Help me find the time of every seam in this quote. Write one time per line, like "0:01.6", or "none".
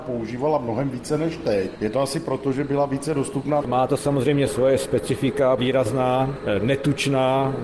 0:03.6
0:05.6